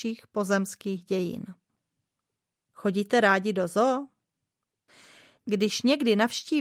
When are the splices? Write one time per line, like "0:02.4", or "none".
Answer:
none